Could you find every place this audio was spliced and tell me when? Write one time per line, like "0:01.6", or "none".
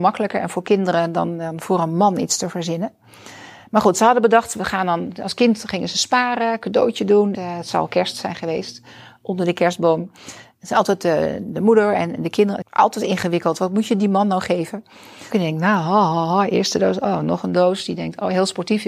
0:07.3
0:12.6
0:15.3

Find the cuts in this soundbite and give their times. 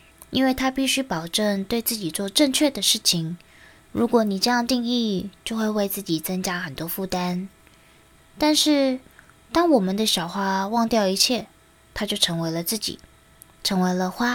0:03.8
0:08.2
0:11.8

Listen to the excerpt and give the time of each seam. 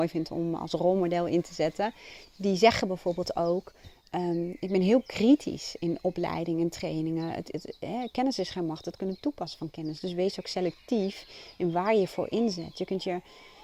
none

